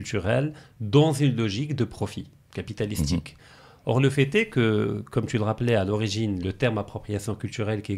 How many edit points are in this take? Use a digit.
0